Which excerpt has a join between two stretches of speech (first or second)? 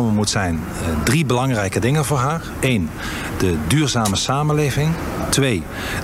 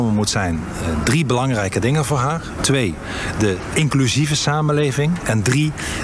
second